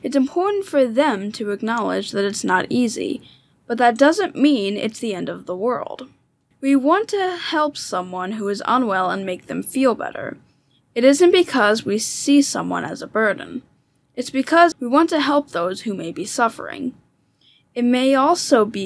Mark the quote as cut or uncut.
cut